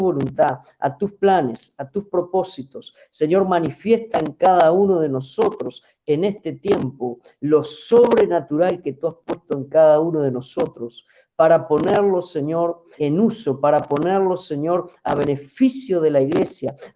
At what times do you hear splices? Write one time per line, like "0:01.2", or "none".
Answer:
0:13.0